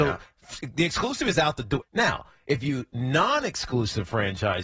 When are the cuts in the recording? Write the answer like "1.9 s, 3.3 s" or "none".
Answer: 1.8 s

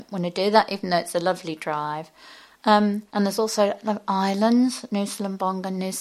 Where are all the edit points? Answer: 3.1 s

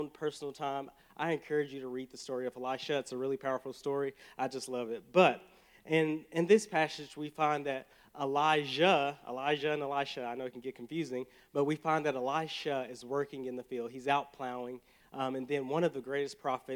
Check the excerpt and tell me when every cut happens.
none

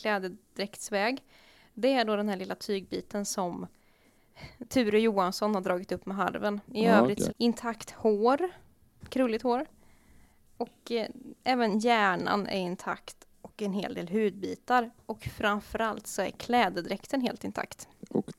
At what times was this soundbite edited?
7.3 s

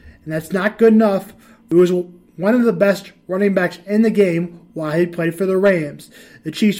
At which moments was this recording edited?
none

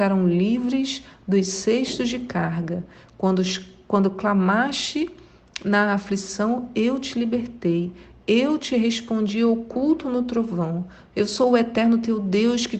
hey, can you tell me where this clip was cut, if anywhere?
11.1 s

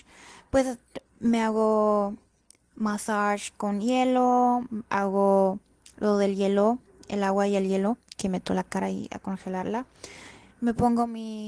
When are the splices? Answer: 1.1 s

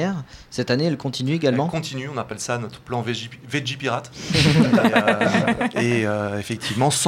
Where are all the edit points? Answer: none

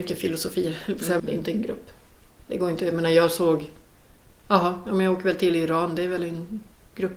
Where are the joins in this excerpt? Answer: 1.2 s

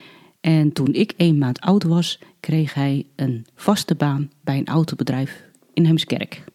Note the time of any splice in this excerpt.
none

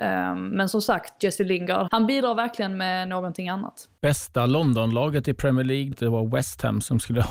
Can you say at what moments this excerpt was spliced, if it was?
1.9 s, 5.9 s

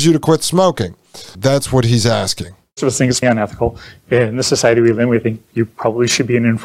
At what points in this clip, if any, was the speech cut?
1.3 s, 3.2 s

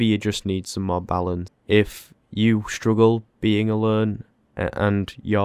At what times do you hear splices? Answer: 1.5 s

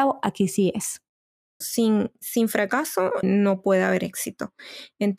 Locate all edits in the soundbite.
1.6 s, 3.2 s

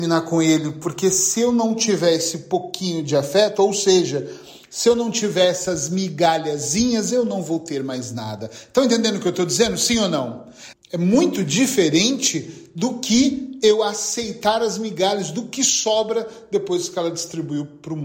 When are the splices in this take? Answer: 10.7 s

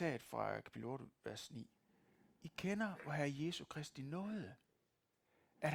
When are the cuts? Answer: none

